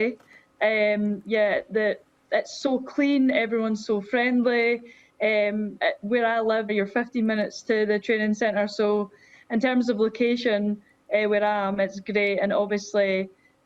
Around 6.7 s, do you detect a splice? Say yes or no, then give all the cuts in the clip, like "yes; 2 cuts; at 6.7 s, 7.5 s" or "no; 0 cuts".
yes; 1 cut; at 6.7 s